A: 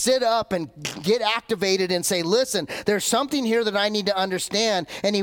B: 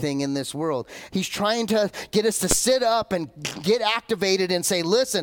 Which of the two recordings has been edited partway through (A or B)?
B